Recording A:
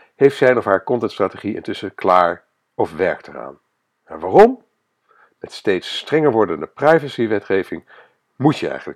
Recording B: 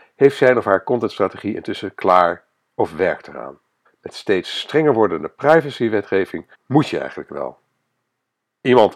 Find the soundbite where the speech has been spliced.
B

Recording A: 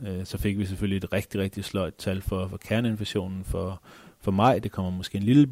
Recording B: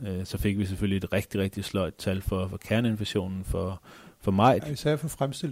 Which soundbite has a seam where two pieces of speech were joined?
B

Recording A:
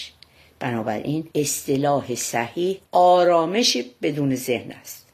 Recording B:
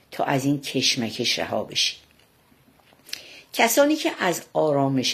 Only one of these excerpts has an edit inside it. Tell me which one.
A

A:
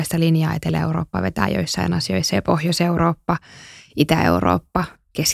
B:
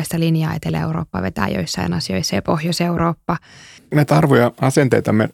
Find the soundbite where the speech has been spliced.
B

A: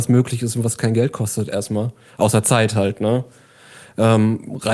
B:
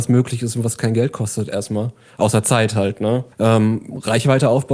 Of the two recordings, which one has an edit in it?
B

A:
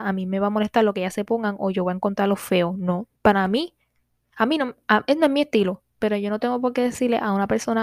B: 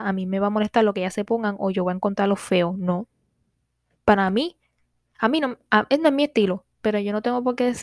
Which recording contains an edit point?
A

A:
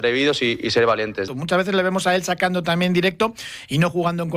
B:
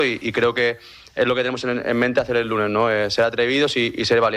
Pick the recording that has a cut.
A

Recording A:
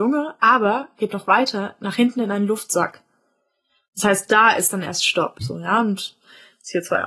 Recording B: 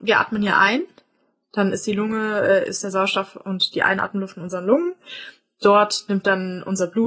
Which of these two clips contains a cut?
A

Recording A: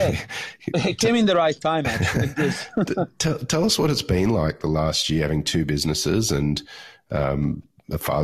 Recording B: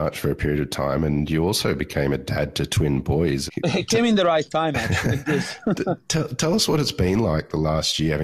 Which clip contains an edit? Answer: B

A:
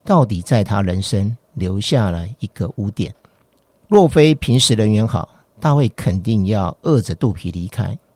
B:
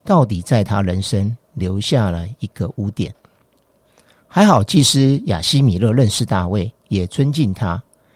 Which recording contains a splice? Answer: A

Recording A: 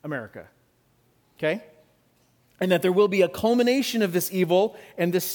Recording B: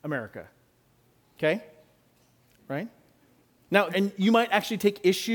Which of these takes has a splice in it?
B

